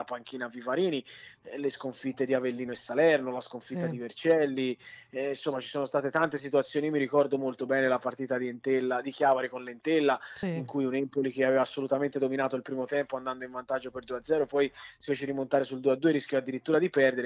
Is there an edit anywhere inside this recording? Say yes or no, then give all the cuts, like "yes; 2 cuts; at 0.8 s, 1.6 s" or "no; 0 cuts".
no; 0 cuts